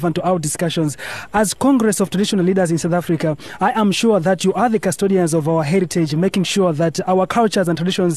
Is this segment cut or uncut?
uncut